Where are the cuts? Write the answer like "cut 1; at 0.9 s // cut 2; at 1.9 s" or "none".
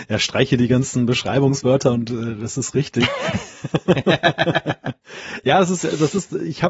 none